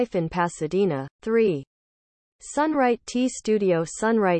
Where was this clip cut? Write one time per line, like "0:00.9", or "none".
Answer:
0:01.1